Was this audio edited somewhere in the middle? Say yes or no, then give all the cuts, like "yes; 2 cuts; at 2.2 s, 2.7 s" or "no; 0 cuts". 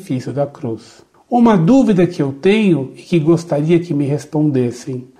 no; 0 cuts